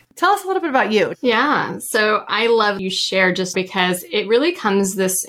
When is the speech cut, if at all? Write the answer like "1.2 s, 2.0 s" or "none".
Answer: 1.1 s, 3.5 s